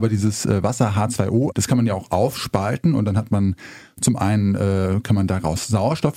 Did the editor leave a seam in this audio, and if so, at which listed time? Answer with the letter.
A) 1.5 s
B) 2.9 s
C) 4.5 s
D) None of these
A